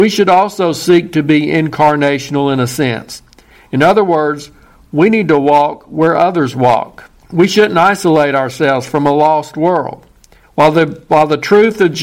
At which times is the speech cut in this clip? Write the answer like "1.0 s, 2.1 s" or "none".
7.2 s, 10.4 s